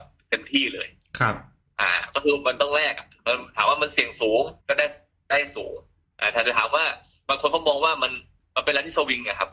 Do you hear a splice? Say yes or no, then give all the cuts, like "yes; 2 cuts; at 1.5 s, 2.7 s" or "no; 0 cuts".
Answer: yes; 1 cut; at 4.6 s